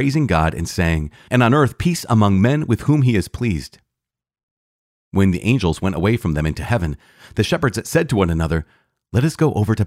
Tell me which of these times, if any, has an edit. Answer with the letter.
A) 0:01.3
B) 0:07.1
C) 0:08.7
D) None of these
A